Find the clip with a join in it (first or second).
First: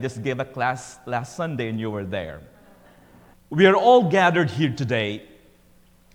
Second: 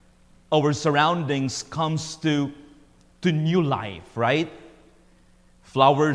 first